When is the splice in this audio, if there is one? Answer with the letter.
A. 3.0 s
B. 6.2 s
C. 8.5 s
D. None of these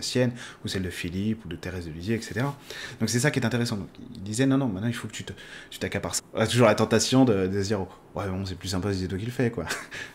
B